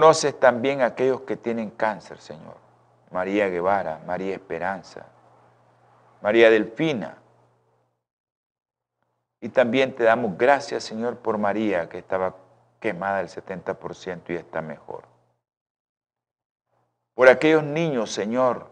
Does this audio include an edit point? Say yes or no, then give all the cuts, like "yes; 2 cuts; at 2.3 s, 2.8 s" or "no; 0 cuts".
no; 0 cuts